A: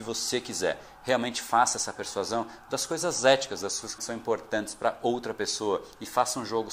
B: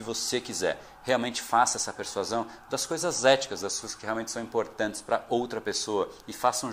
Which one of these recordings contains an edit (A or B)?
A